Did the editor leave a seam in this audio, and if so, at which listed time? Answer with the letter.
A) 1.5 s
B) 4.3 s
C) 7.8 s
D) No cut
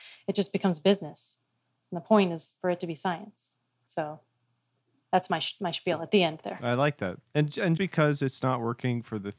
C